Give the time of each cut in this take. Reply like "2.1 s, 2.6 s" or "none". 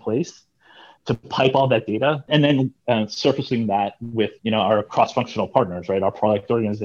2.3 s, 4.4 s